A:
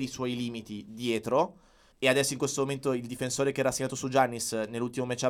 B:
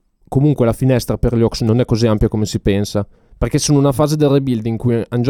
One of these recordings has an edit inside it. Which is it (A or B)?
A